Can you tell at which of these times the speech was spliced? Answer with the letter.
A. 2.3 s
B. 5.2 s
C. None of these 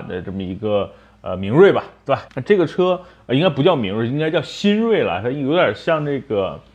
A